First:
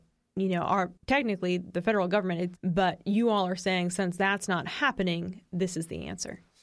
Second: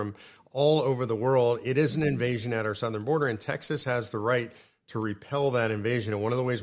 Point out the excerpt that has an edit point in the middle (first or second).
first